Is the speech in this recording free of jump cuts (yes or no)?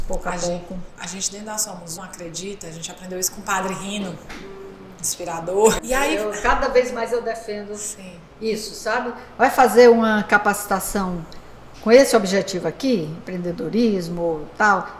no